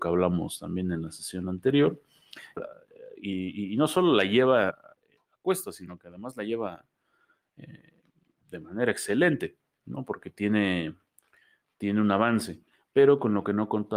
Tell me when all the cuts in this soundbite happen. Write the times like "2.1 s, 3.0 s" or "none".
2.6 s, 4.7 s